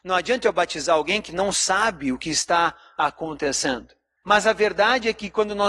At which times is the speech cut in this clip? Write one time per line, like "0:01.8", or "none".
0:04.2